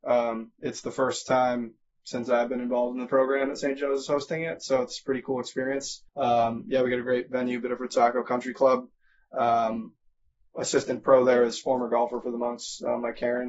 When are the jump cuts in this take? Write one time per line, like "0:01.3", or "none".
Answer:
0:06.1